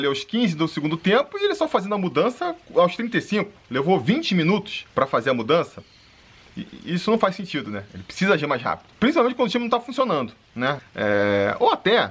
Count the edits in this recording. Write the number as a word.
three